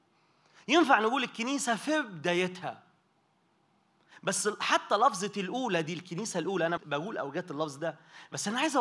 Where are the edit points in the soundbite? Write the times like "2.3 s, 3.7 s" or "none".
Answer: 6.8 s